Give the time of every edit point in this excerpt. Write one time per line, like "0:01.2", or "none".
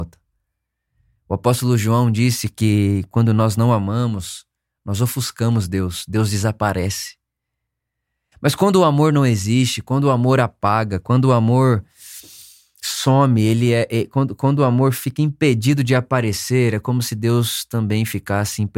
0:08.3